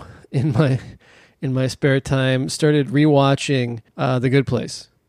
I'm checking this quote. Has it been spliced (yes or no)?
yes